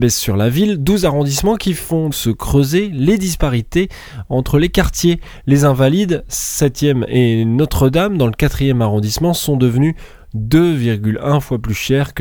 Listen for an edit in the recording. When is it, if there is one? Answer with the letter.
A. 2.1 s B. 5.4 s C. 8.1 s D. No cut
A